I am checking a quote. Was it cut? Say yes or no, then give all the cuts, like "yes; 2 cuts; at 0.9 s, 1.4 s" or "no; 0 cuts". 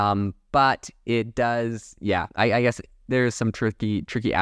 no; 0 cuts